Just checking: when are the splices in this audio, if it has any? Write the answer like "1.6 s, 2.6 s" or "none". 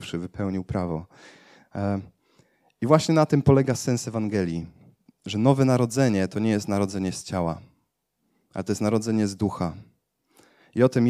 5.1 s